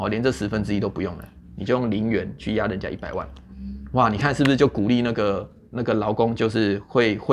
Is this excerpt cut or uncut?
uncut